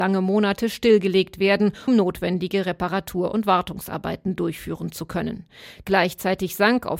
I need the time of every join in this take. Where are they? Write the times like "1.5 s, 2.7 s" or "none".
1.9 s, 5.8 s